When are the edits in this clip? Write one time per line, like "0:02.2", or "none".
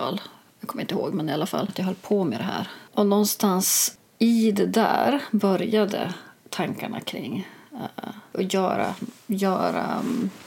0:01.7
0:02.9
0:04.1